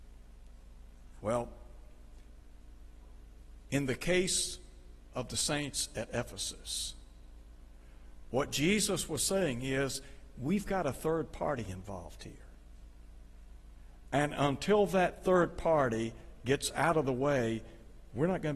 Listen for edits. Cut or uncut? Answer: cut